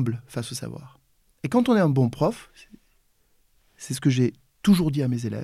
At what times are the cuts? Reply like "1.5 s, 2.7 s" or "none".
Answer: 1.3 s

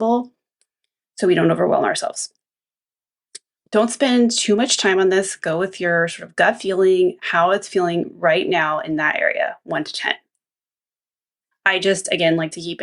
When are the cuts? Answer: 3.6 s, 11.5 s

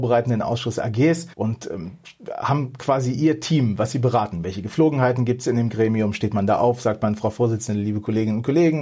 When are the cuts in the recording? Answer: 1.3 s

